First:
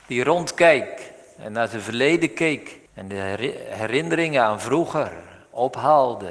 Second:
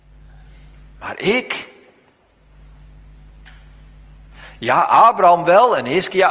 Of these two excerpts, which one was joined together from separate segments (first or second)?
first